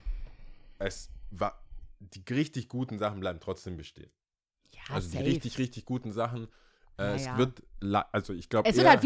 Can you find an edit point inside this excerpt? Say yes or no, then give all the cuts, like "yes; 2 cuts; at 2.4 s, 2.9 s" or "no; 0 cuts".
no; 0 cuts